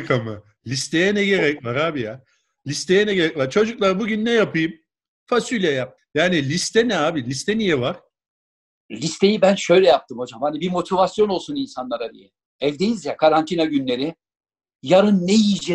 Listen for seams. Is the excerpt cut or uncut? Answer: cut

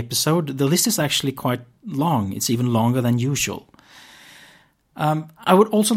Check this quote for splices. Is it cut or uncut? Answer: uncut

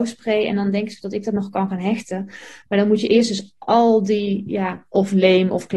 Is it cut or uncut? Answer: uncut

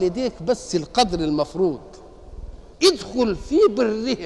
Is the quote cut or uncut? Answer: cut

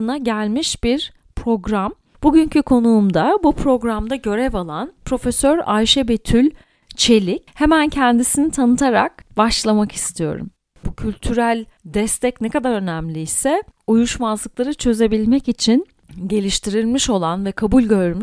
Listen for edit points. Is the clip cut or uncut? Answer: cut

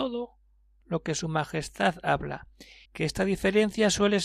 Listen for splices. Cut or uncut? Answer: cut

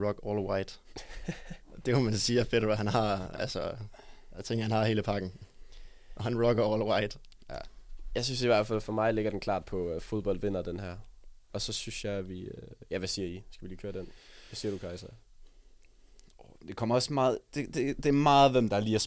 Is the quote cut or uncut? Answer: uncut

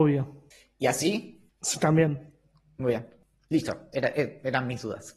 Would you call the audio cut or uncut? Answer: uncut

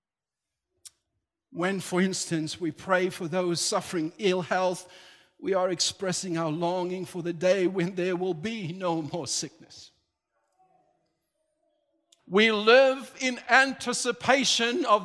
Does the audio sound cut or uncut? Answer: cut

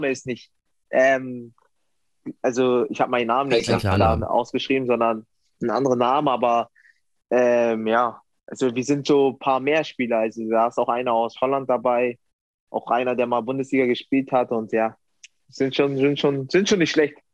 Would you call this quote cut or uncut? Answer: uncut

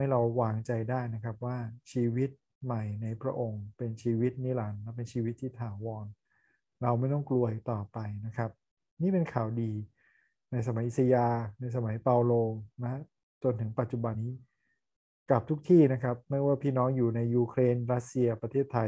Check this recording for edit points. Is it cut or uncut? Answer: cut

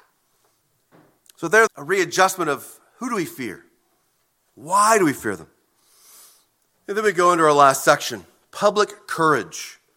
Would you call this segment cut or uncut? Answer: cut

